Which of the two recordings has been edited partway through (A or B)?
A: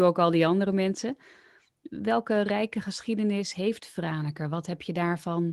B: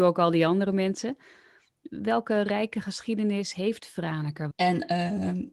B